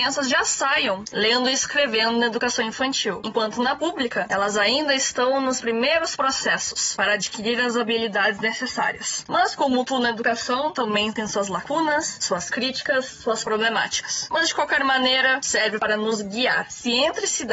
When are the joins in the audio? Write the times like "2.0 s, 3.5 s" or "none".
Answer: 9.2 s